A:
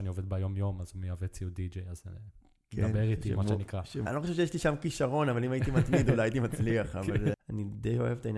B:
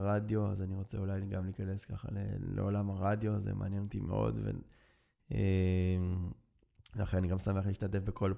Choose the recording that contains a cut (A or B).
A